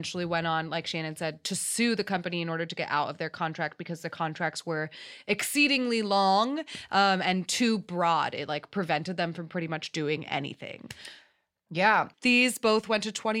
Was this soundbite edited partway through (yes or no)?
yes